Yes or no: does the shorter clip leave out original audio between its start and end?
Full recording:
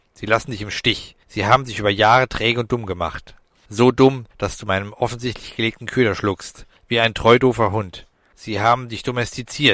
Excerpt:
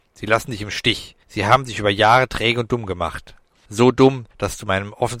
no